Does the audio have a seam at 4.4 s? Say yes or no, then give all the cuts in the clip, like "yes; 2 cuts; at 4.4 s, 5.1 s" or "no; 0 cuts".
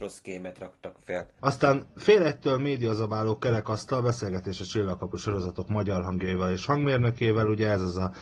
no; 1 cut; at 1.4 s